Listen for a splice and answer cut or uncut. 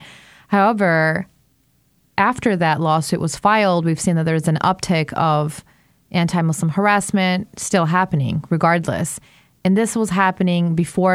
uncut